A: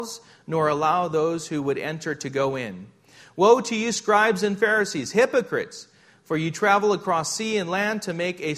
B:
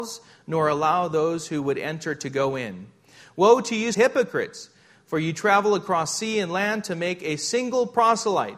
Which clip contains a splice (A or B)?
B